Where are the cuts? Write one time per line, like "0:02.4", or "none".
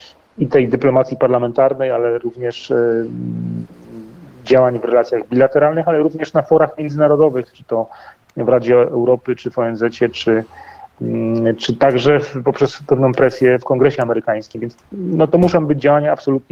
none